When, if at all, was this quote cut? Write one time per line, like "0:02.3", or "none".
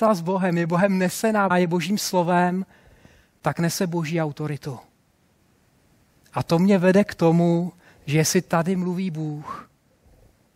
0:01.5